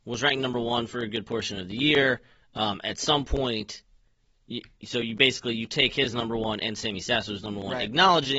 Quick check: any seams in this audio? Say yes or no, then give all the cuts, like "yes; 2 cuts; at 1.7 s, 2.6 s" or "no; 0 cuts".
no; 0 cuts